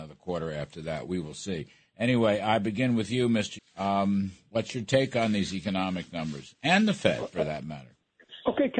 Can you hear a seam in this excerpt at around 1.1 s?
no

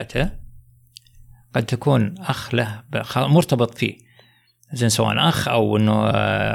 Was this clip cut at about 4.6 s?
no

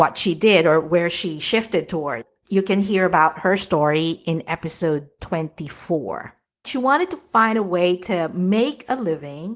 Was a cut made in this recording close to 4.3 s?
no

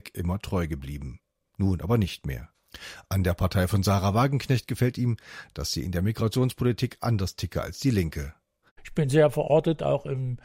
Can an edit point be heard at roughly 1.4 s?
no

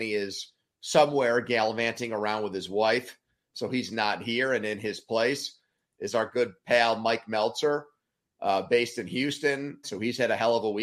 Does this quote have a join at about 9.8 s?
yes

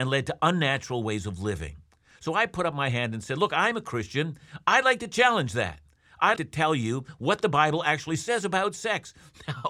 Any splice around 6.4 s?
yes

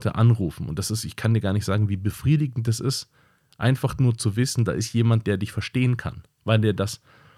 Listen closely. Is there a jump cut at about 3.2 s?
no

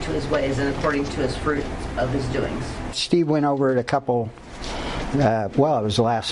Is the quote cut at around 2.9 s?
yes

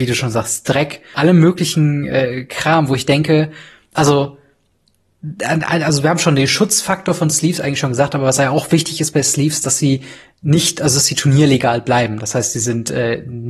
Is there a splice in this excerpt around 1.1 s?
yes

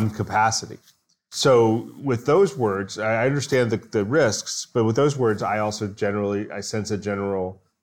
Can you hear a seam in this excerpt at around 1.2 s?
no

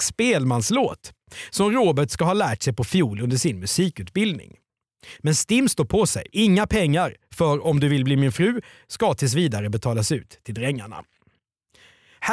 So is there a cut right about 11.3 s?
no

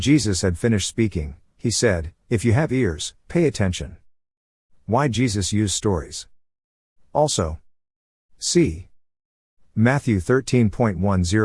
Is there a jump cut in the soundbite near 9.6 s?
no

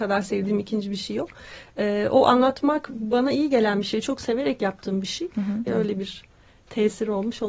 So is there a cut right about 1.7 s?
no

